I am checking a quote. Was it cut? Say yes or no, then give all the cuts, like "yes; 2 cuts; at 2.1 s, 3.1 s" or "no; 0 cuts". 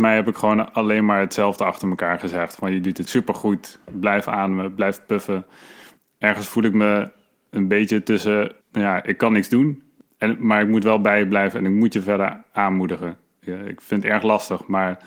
yes; 1 cut; at 8.6 s